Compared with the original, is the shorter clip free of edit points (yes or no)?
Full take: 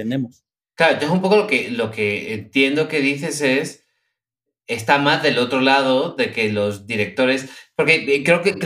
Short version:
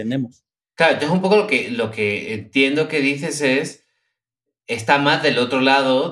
yes